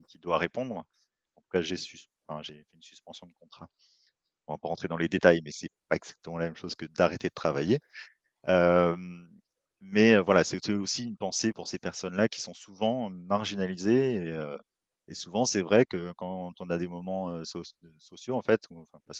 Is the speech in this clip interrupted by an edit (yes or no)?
yes